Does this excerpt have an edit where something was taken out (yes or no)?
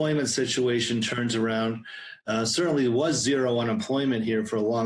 no